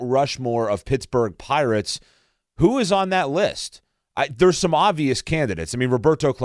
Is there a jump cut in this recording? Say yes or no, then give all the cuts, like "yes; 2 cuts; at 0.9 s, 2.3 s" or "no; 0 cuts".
no; 0 cuts